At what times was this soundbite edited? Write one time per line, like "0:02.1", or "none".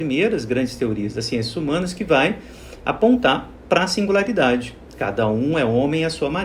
none